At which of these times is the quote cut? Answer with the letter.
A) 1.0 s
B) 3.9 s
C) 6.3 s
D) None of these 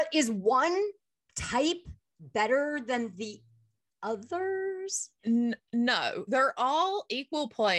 C